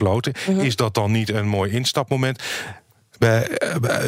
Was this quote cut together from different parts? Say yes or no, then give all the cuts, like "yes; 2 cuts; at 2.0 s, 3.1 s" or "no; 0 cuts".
no; 0 cuts